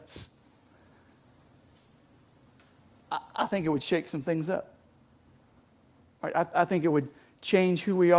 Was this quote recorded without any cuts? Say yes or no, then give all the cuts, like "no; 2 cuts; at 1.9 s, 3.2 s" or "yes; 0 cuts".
yes; 0 cuts